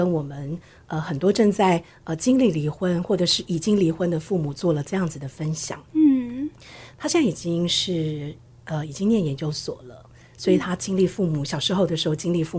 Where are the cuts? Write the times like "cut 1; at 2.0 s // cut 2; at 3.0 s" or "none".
none